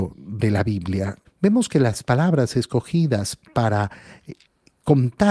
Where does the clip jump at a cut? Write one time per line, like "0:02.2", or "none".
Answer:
0:01.2